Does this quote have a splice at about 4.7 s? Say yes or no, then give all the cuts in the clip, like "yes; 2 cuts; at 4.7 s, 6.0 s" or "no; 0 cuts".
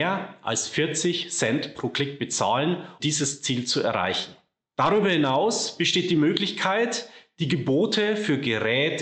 no; 1 cut; at 3.0 s